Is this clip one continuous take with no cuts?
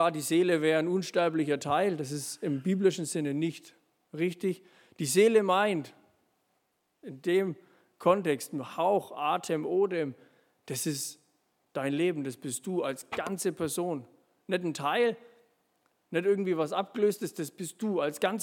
yes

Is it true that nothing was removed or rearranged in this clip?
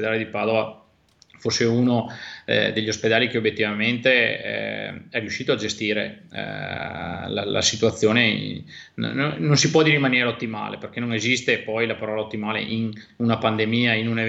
yes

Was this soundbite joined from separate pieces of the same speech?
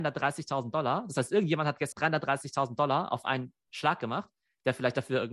yes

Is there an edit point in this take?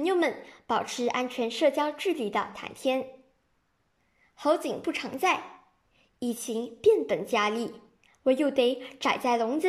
no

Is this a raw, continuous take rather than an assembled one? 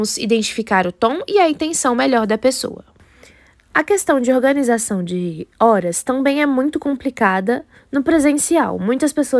yes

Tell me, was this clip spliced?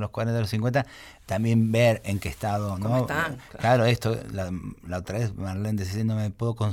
no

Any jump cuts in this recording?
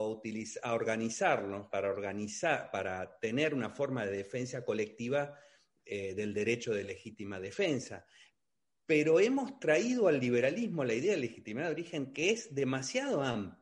yes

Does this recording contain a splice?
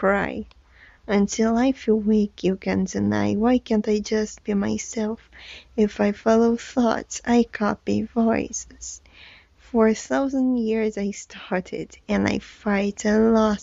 no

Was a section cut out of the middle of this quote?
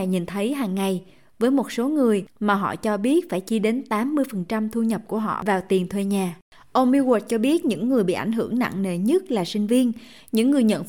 no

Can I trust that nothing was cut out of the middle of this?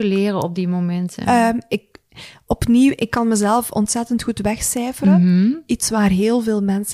yes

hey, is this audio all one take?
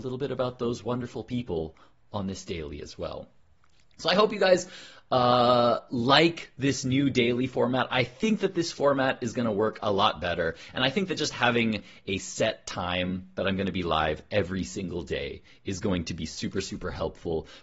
yes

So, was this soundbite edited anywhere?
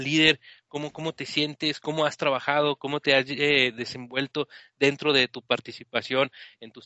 no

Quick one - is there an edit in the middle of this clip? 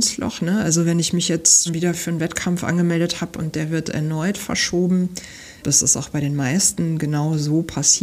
yes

